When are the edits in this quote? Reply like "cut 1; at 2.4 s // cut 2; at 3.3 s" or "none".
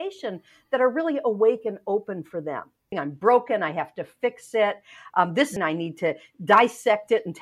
cut 1; at 2.9 s // cut 2; at 5.6 s

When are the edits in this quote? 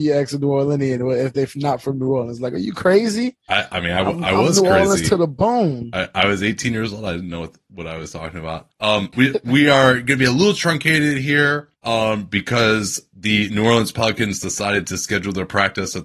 cut 1; at 9.1 s

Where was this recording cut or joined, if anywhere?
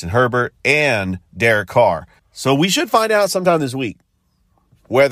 cut 1; at 2.2 s

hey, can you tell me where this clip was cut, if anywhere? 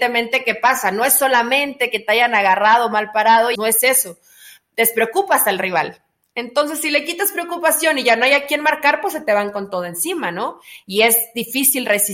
cut 1; at 3.6 s

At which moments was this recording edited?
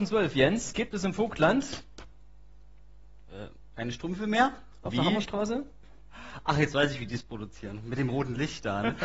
cut 1; at 4.9 s

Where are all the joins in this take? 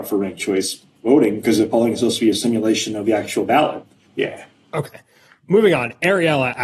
cut 1; at 4.0 s

